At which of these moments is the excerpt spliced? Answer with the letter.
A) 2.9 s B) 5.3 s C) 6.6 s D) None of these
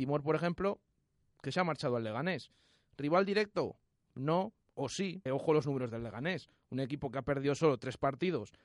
B